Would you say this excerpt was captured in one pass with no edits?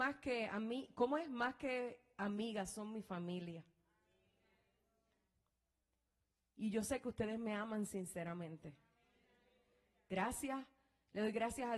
yes; 0 cuts

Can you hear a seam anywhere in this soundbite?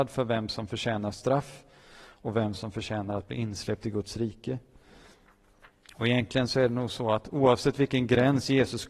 no; 0 cuts

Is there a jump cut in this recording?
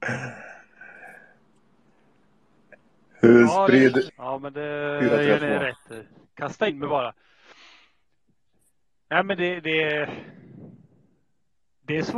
yes; 1 cut; at 4.1 s

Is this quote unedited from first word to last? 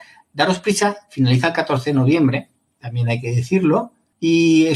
yes; 0 cuts

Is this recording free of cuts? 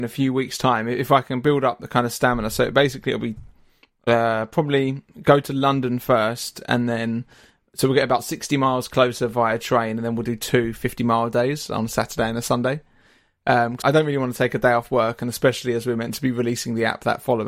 no; 1 cut; at 13.8 s

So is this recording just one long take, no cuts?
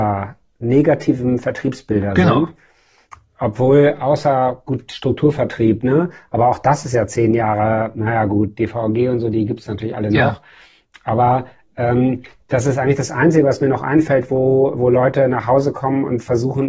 yes; 0 cuts

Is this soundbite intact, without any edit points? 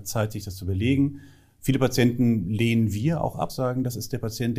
yes; 0 cuts

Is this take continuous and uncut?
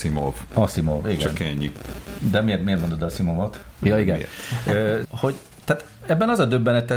no; 2 cuts; at 3.8 s, 5.0 s

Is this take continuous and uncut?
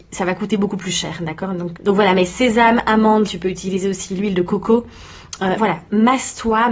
no; 3 cuts; at 1.8 s, 3.3 s, 5.6 s

